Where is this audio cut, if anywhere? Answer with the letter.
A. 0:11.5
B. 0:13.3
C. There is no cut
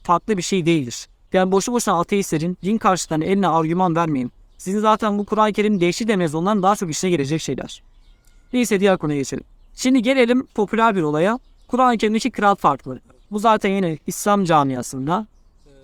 B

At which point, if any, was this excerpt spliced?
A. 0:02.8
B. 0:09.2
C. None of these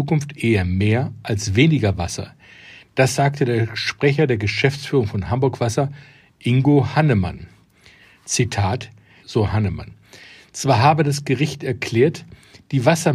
B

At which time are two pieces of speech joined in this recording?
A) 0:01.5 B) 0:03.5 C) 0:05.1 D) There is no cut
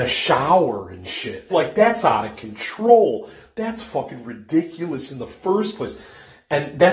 A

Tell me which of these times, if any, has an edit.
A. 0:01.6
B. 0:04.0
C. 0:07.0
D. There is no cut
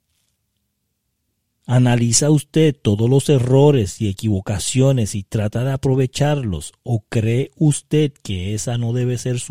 A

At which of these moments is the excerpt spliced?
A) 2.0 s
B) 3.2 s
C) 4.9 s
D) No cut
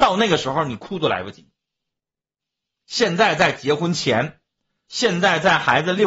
D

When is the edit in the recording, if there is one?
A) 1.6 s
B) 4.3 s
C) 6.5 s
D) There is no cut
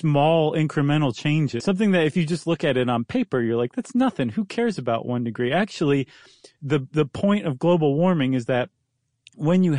A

